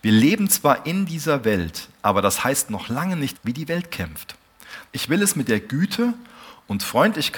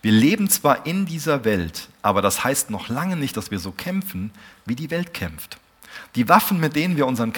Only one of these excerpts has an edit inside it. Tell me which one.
first; 2 cuts; at 3.3 s, 4.9 s

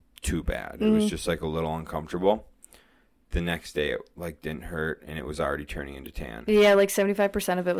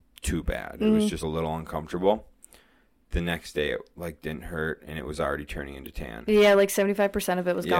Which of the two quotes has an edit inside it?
second; 1 cut; at 1.2 s

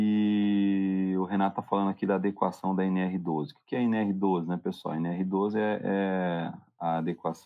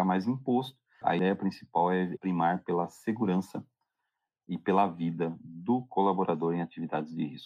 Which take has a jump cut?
second; 2 cuts; at 1.0 s, 2.2 s

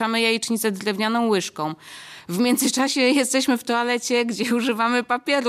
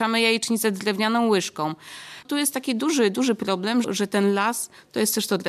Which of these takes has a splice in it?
second; 2 cuts; at 2.2 s, 3.8 s

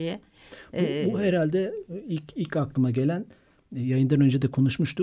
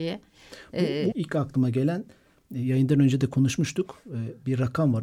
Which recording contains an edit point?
second; 1 cut; at 1.1 s

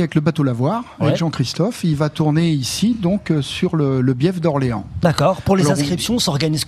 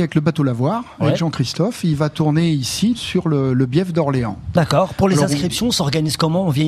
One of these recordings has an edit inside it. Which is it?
second; 1 cut; at 2.9 s

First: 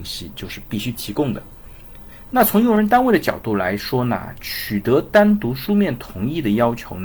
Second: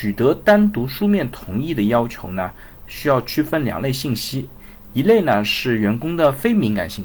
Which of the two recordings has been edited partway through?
first; 1 cut; at 2.3 s

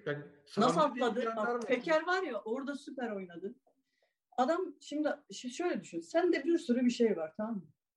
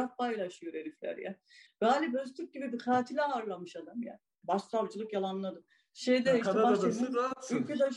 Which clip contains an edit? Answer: second; 3 cuts; at 1.7 s, 4.4 s, 5.6 s

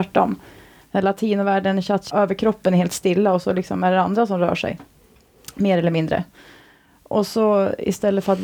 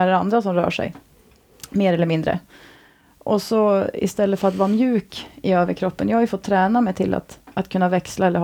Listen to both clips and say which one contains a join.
first; 1 cut; at 2.1 s

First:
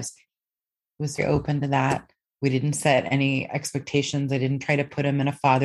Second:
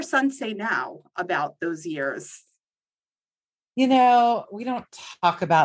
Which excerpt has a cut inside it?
first; 1 cut; at 1.2 s

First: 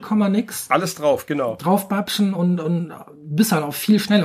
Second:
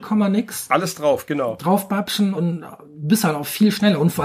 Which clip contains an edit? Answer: second; 1 cut; at 2.3 s

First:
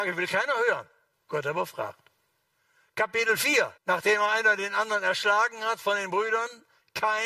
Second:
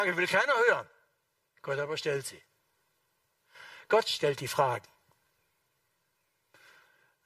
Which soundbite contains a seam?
first; 2 cuts; at 1.1 s, 3.8 s

